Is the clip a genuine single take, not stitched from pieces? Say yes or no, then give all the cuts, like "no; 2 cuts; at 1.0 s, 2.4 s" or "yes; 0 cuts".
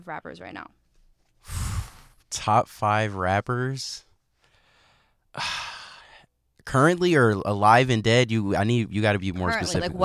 yes; 0 cuts